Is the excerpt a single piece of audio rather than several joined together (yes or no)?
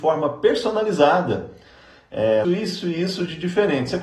no